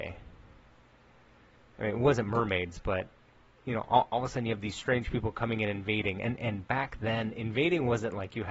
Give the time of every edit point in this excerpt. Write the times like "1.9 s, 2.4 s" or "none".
none